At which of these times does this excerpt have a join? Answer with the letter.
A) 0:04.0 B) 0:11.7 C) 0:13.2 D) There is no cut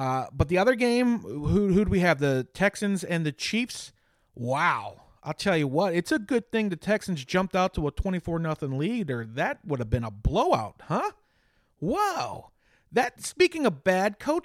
C